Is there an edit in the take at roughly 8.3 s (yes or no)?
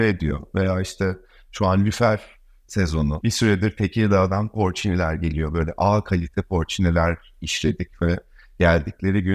no